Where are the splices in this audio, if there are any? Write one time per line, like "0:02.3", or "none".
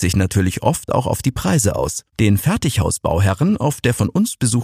0:02.1